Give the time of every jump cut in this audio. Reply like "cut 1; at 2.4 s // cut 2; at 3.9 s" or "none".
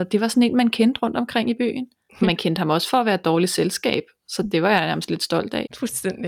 none